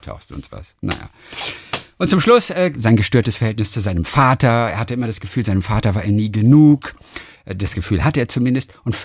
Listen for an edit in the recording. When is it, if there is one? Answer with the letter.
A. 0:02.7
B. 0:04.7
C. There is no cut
A